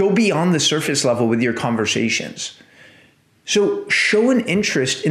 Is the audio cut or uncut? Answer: uncut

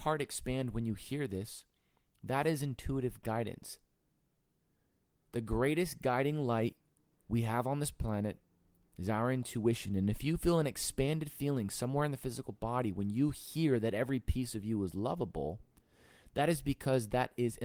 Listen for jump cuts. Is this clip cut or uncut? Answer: uncut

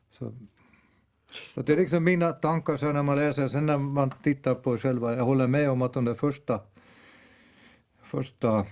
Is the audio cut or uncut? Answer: uncut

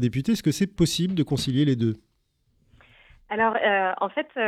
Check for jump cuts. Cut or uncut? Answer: uncut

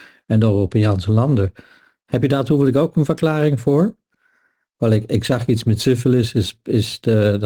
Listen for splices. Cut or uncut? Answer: uncut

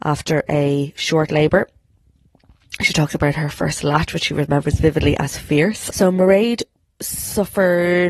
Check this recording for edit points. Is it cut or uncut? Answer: cut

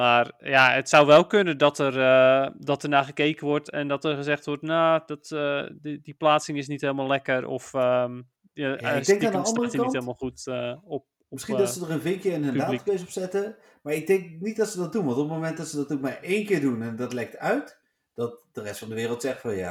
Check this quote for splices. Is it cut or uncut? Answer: uncut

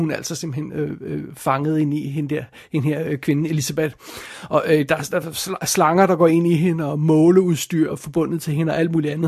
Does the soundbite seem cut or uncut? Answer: cut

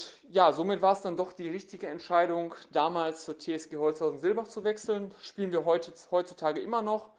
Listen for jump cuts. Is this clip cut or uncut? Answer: uncut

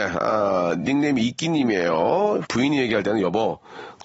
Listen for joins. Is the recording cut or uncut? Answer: cut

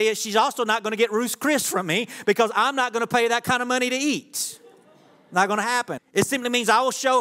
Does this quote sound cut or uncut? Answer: cut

